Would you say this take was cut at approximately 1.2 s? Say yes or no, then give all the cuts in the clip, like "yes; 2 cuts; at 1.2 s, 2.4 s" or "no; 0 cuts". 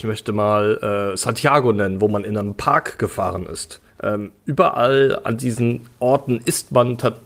no; 1 cut; at 3.9 s